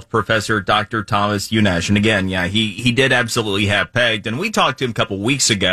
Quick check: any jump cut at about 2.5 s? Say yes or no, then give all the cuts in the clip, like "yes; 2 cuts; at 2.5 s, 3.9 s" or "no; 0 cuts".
no; 0 cuts